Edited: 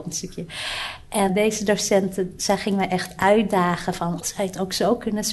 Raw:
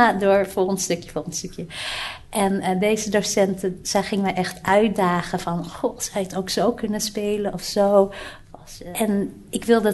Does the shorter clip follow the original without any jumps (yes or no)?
no